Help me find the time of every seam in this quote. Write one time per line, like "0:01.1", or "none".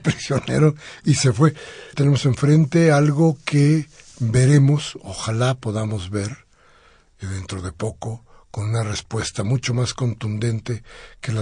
0:01.9